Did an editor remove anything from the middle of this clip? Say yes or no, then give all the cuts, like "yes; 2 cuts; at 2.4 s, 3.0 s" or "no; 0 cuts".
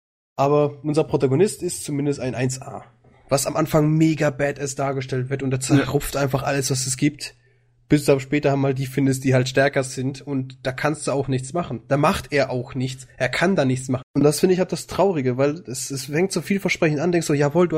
yes; 2 cuts; at 14.0 s, 15.9 s